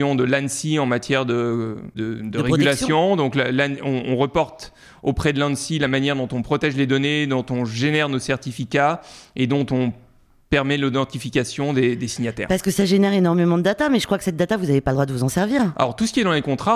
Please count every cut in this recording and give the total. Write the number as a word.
zero